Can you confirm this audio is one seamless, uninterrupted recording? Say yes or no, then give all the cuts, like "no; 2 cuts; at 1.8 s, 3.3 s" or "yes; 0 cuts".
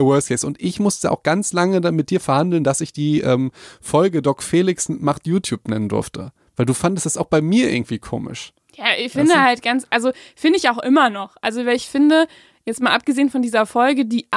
yes; 0 cuts